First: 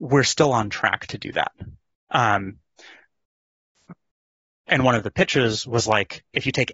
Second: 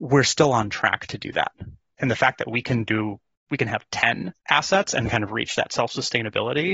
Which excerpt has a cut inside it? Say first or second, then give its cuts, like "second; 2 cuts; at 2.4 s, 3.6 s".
second; 2 cuts; at 2.0 s, 4.4 s